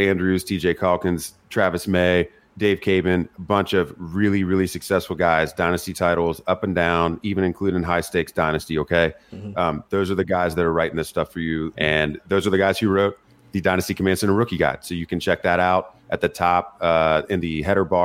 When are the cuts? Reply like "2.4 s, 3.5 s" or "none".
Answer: 11.7 s